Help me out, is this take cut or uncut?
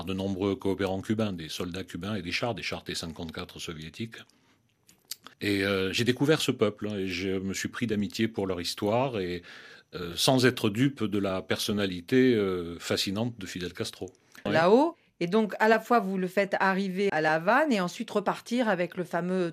cut